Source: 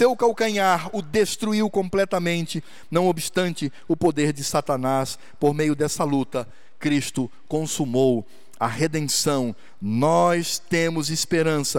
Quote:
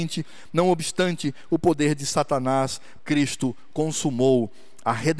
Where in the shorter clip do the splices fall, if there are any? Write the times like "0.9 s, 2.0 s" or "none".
3.0 s